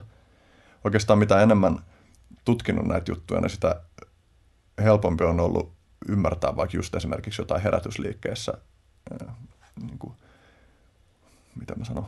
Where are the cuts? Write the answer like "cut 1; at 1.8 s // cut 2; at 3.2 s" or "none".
none